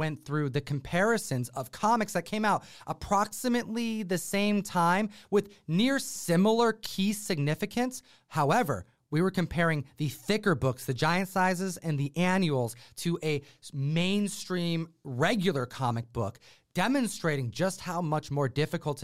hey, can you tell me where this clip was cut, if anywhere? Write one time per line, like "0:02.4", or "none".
none